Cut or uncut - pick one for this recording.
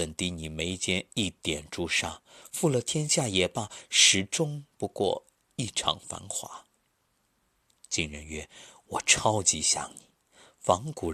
uncut